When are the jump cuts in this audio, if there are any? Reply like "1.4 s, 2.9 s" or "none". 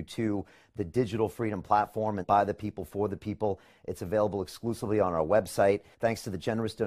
2.2 s